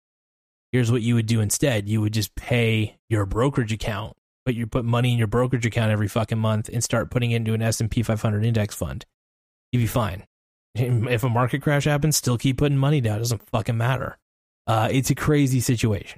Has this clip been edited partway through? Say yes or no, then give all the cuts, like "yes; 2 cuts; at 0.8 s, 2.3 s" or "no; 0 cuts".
yes; 1 cut; at 14.6 s